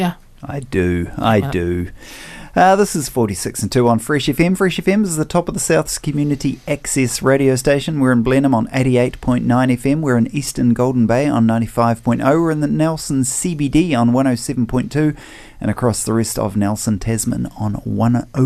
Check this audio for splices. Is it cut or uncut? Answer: uncut